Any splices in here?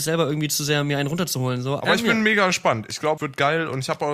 yes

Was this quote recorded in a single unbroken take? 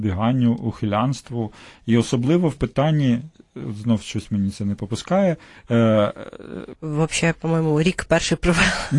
no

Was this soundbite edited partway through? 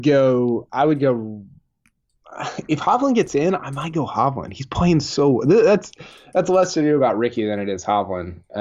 no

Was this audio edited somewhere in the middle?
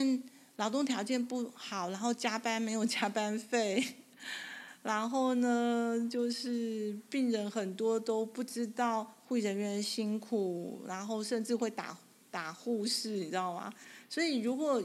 no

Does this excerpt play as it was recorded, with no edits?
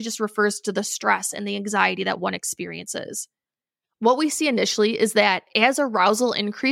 yes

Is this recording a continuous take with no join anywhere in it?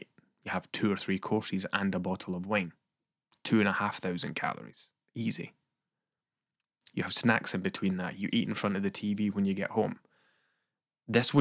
yes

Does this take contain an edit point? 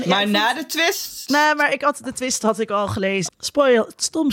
yes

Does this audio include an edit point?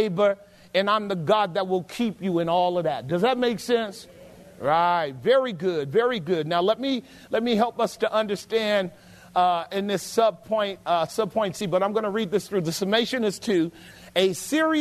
no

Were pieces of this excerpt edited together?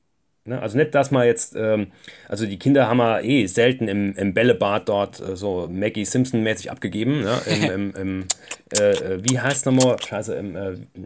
no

